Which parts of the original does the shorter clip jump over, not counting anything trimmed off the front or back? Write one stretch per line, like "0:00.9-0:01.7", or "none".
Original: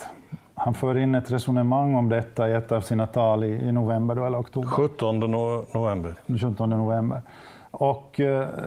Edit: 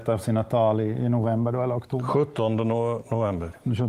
none